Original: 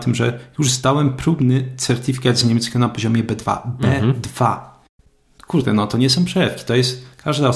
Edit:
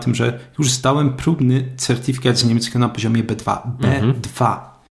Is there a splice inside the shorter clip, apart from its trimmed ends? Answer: no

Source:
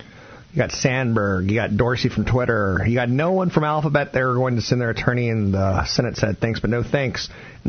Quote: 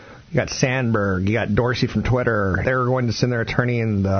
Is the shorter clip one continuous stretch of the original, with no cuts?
no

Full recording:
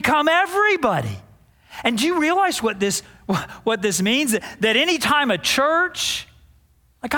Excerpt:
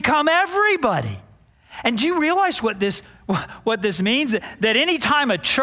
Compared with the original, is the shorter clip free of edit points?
yes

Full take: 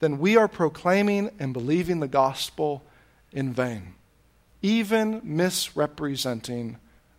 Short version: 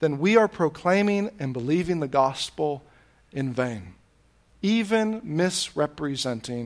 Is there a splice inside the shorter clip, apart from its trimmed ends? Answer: no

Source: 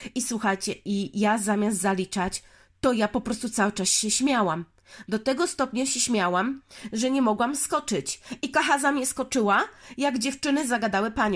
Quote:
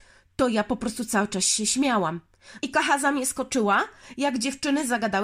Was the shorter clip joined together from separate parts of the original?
yes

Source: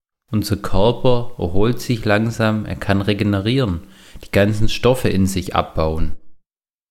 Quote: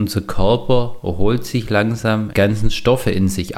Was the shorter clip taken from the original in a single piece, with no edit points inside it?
no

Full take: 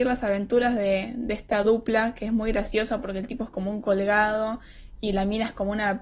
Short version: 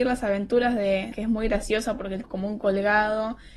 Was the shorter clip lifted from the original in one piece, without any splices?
no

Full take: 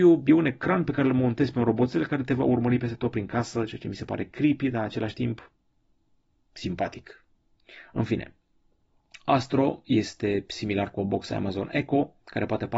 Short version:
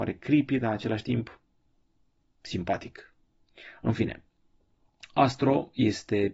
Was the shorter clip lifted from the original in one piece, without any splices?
yes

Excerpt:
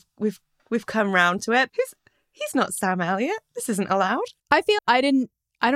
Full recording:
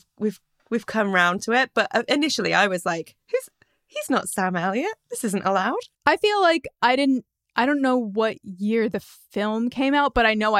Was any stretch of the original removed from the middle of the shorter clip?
yes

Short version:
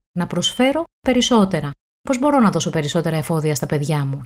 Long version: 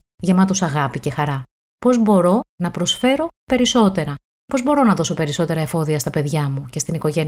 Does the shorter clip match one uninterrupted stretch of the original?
yes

